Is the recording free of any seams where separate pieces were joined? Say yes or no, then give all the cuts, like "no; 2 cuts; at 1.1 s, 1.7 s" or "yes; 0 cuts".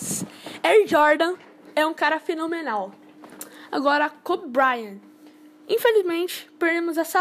yes; 0 cuts